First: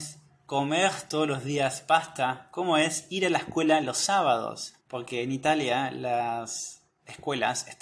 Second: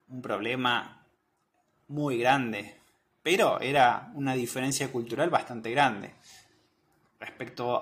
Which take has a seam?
first; 1 cut; at 4.8 s

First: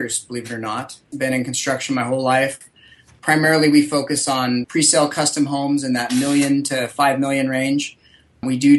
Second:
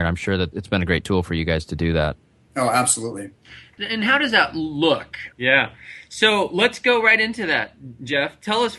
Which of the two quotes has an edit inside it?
second; 1 cut; at 5.3 s

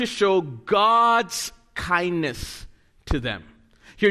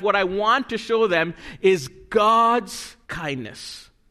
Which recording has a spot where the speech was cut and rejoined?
second; 1 cut; at 3.0 s

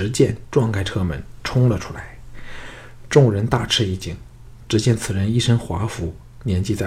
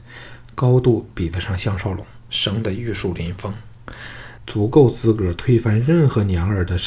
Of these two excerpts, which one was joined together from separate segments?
second; 2 cuts; at 2.3 s, 4.4 s

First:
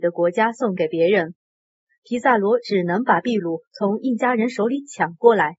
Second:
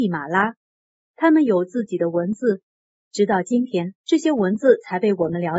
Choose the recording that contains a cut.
second; 1 cut; at 4.0 s

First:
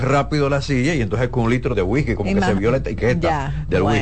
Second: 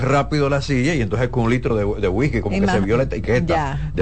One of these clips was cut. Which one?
first; 1 cut; at 1.7 s

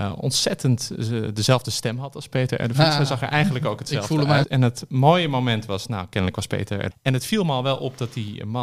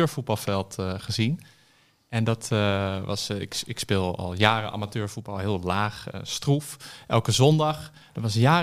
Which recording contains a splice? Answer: first; 2 cuts; at 4.4 s, 6.9 s

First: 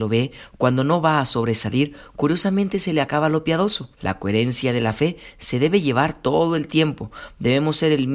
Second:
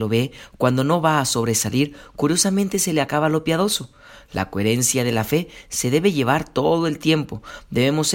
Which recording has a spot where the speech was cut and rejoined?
first; 1 cut; at 3.9 s

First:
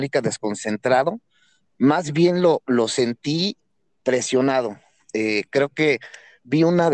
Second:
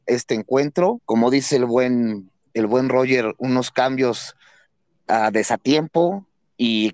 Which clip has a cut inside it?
second; 1 cut; at 1.0 s

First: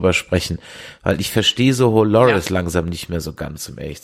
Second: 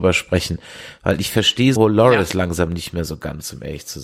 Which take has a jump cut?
second; 1 cut; at 1.8 s

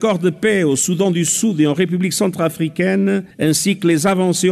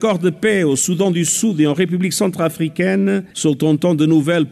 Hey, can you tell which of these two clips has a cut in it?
second; 1 cut; at 3.3 s

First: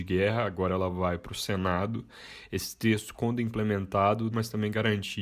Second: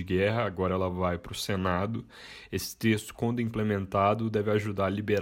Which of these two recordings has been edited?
first; 1 cut; at 4.3 s

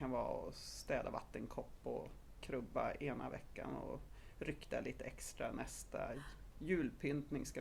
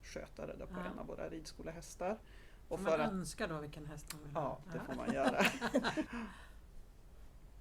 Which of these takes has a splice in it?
second; 1 cut; at 6.1 s

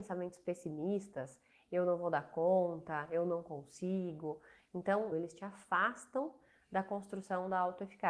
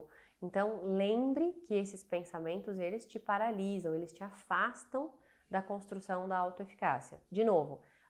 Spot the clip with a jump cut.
first; 1 cut; at 5.1 s

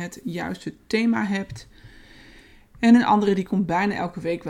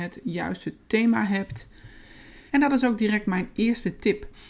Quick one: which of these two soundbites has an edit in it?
second; 1 cut; at 2.5 s

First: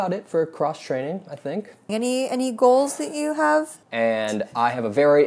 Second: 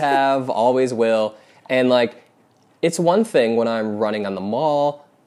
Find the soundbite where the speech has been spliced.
first; 2 cuts; at 1.9 s, 3.8 s

